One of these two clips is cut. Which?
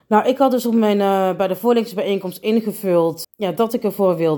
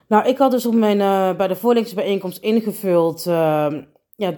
first; 1 cut; at 3.2 s

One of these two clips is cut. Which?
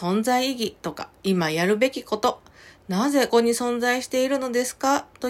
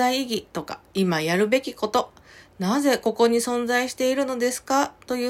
first; 1 cut; at 3.3 s

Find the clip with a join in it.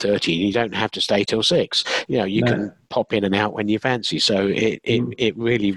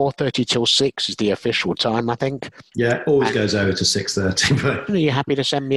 second; 2 cuts; at 2.7 s, 4.9 s

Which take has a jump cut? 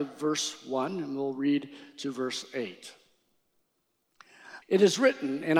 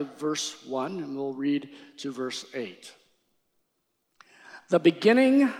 first; 1 cut; at 4.6 s

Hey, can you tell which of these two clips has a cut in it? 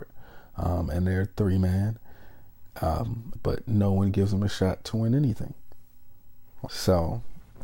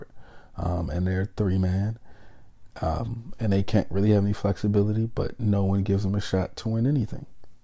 first; 2 cuts; at 3.4 s, 6.7 s

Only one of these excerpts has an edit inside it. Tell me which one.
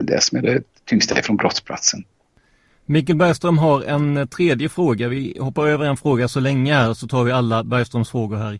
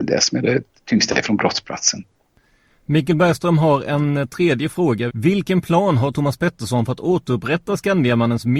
second; 1 cut; at 5.1 s

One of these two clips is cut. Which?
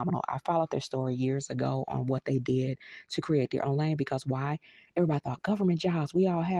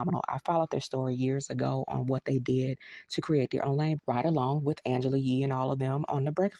second; 1 cut; at 4.0 s

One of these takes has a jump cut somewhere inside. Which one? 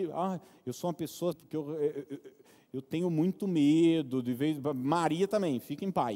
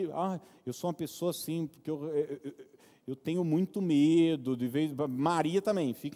first; 1 cut; at 1.3 s

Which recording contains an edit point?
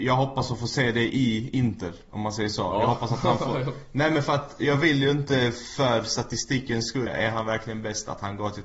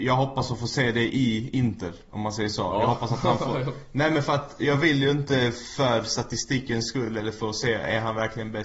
first; 1 cut; at 7.1 s

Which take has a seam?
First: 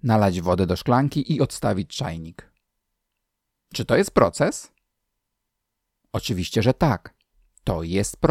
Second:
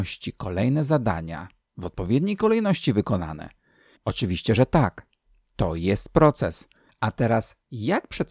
second; 2 cuts; at 4.0 s, 6.9 s

